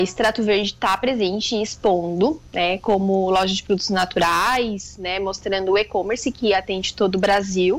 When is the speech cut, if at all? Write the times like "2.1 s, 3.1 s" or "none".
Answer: none